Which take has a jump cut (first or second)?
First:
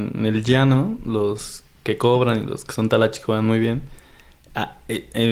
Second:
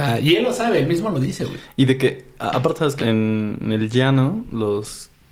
second